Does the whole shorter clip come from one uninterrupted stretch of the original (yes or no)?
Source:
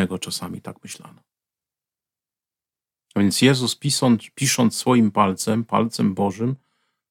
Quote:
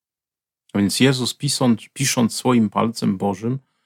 no